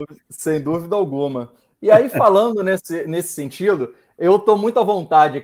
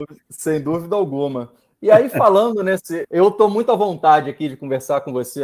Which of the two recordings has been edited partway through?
second; 1 cut; at 3.0 s

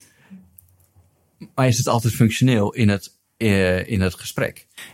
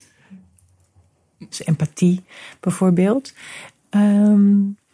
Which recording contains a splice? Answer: second; 1 cut; at 1.5 s

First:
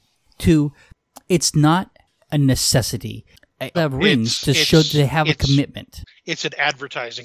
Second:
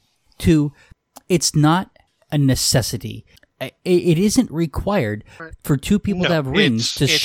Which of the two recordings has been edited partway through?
first; 1 cut; at 3.7 s

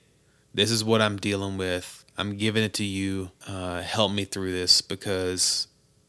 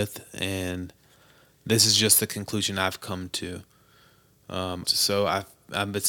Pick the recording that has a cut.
second; 1 cut; at 4.8 s

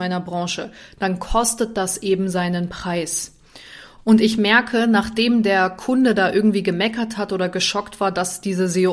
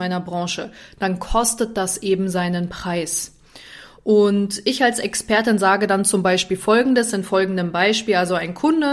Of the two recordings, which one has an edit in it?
first; 1 cut; at 4.0 s

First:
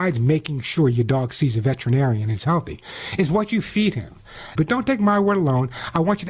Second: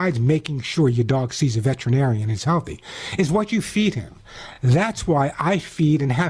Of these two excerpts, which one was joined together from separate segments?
first; 1 cut; at 4.6 s

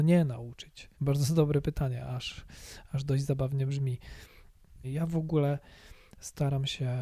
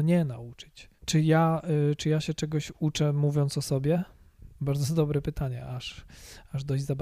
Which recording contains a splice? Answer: first; 2 cuts; at 1.0 s, 4.8 s

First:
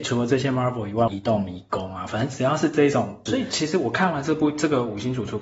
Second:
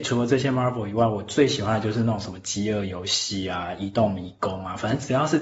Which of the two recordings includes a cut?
first; 2 cuts; at 1.1 s, 3.3 s

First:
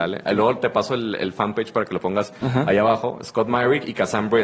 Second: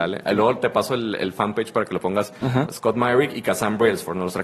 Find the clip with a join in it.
second; 1 cut; at 2.7 s

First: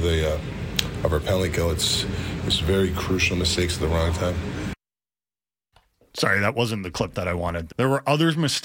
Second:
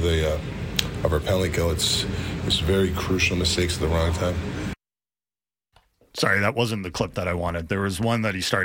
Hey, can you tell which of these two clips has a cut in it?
first; 1 cut; at 7.7 s

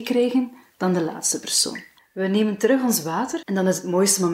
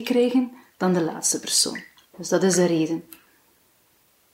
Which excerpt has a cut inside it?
first; 2 cuts; at 2.0 s, 3.4 s

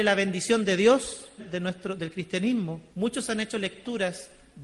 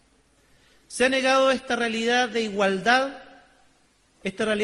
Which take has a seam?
first; 2 cuts; at 1.4 s, 2.9 s

